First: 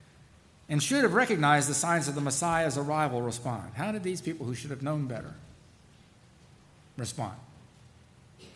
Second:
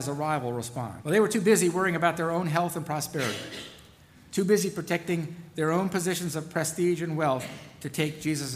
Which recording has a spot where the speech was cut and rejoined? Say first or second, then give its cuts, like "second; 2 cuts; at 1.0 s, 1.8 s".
second; 1 cut; at 1.0 s